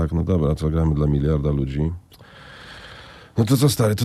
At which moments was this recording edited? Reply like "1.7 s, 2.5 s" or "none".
none